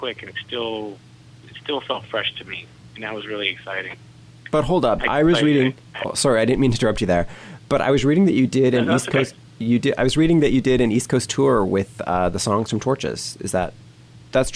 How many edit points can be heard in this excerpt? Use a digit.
0